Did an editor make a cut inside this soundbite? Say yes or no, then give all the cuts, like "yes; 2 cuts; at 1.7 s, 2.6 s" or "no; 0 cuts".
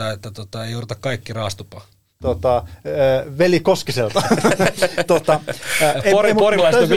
yes; 1 cut; at 2.1 s